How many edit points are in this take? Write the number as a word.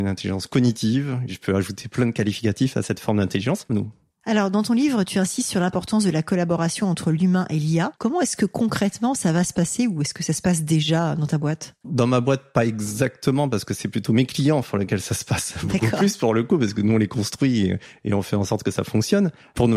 two